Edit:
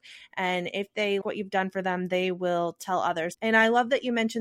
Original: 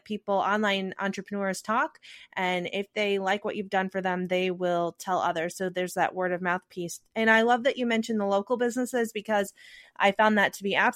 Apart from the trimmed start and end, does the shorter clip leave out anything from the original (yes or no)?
yes